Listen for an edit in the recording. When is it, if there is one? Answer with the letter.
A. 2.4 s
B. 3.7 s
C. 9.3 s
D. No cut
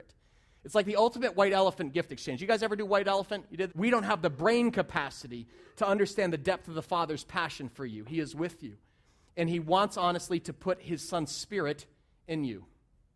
B